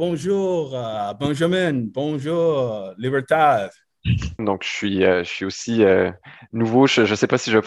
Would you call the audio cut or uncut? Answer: cut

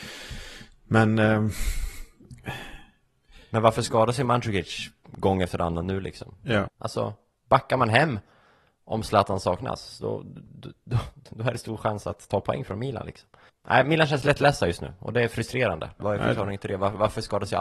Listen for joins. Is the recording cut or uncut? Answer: cut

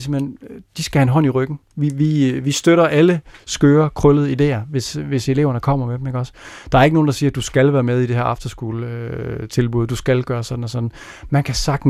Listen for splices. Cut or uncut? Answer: uncut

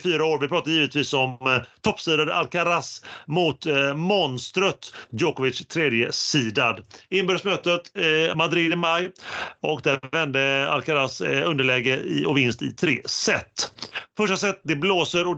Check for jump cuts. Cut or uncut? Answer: uncut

